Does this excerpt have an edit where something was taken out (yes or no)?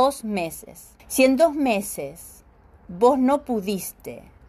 yes